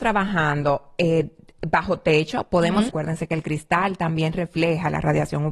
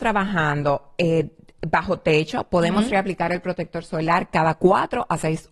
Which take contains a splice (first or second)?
first